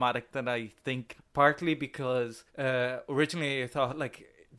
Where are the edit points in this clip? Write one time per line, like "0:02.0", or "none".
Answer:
0:01.2
0:02.5